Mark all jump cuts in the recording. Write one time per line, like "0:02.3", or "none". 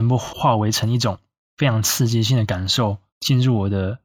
0:03.1